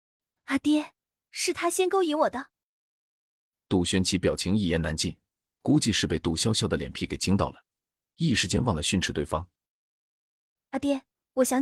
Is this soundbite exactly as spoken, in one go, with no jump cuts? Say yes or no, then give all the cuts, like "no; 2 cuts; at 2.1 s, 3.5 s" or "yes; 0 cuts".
yes; 0 cuts